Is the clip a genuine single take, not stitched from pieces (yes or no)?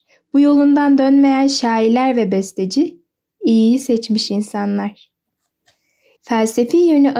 no